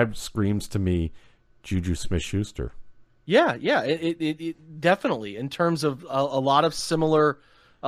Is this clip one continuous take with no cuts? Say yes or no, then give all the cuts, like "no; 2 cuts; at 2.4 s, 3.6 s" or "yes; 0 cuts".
yes; 0 cuts